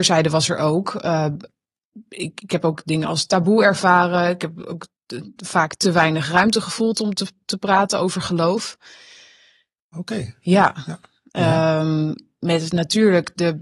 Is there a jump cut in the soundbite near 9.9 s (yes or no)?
yes